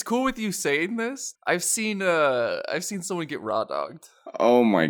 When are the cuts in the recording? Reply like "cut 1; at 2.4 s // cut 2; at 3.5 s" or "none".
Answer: cut 1; at 1.3 s